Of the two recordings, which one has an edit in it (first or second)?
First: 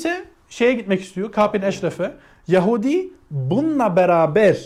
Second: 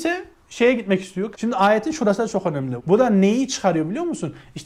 second